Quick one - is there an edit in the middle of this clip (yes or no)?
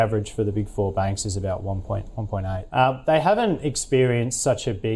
yes